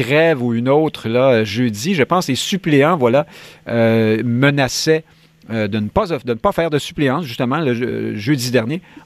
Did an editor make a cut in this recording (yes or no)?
no